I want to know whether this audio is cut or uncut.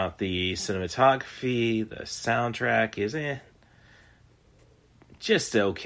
uncut